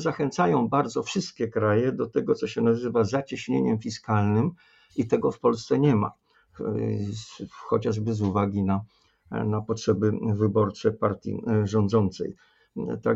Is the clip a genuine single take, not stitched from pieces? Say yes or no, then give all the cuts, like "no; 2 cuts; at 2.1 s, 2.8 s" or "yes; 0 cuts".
yes; 0 cuts